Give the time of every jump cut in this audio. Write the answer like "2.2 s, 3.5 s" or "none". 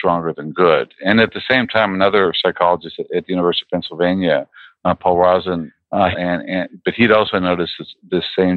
6.1 s